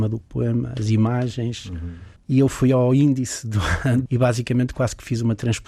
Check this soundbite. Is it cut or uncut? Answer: cut